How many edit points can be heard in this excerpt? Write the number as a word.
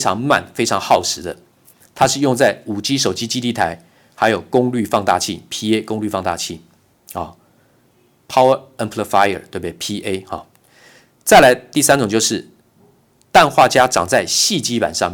zero